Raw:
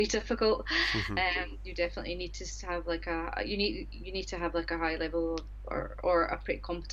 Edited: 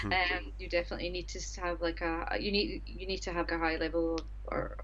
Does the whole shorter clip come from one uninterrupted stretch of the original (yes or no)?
no